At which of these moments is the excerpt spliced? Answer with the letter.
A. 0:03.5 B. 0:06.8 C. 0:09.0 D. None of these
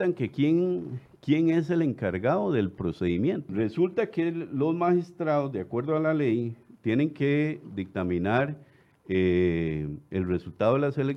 A